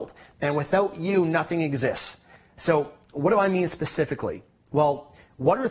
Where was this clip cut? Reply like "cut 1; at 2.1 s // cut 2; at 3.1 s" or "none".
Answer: cut 1; at 2.4 s